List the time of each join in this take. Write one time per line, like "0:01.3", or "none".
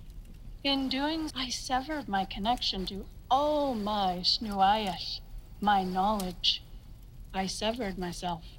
0:01.3

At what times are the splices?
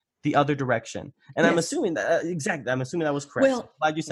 none

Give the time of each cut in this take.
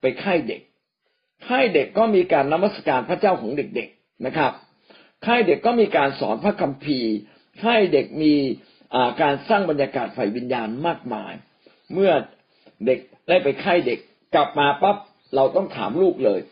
none

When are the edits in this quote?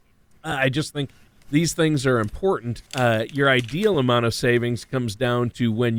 0:02.9

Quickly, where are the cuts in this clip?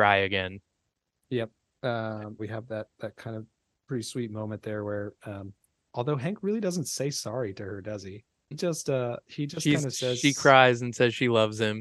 0:02.4
0:08.5

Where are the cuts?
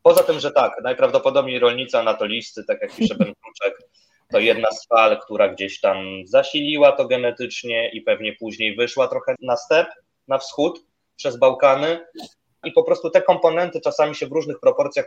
0:09.4
0:12.6

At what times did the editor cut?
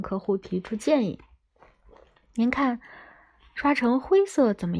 none

